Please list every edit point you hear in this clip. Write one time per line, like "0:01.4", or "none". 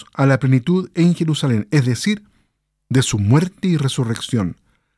none